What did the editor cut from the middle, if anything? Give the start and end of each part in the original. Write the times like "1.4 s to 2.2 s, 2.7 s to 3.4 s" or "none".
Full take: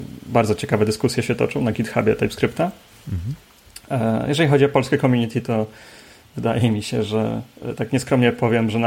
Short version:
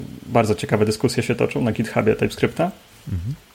none